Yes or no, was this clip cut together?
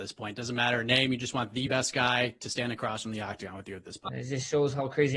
yes